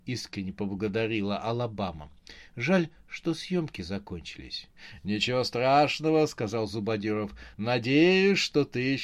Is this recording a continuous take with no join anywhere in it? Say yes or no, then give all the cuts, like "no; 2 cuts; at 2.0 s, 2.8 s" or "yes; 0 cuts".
yes; 0 cuts